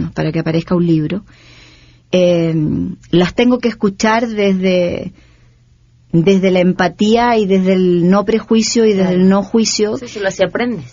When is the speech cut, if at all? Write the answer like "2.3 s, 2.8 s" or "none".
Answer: none